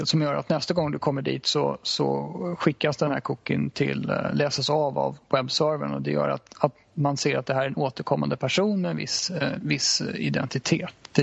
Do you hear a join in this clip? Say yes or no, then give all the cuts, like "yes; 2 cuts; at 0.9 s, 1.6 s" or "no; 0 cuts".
no; 0 cuts